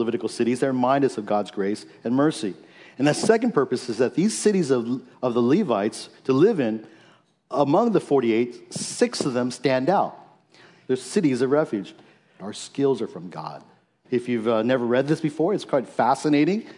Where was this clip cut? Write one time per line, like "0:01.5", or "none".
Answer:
0:10.8
0:12.4
0:14.0